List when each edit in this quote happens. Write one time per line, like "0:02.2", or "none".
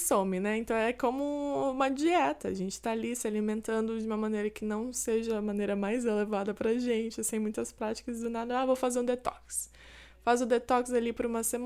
none

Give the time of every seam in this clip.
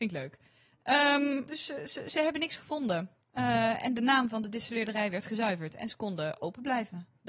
0:01.5

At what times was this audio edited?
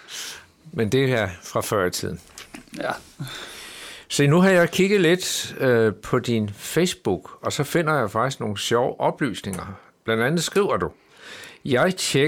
none

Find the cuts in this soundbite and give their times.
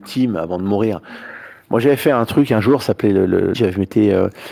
0:03.5

